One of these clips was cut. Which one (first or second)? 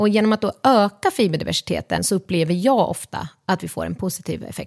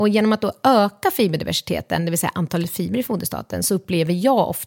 first